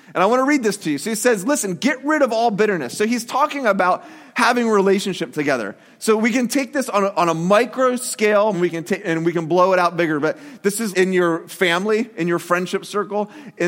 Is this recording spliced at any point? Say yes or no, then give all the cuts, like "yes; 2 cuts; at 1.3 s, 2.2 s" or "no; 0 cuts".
yes; 2 cuts; at 8.5 s, 10.9 s